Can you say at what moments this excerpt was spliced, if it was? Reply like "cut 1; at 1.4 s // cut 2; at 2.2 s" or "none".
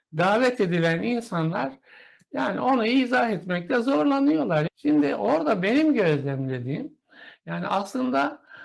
cut 1; at 4.7 s